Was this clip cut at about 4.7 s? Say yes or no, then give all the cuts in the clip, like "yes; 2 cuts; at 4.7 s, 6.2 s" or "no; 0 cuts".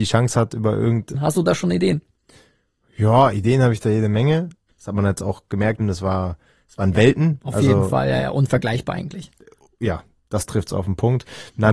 yes; 3 cuts; at 1.1 s, 4.7 s, 5.8 s